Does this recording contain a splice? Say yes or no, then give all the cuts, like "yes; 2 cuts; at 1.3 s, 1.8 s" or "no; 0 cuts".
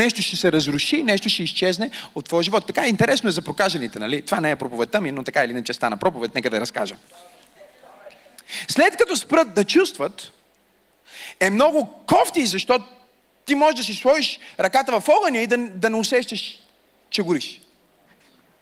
no; 0 cuts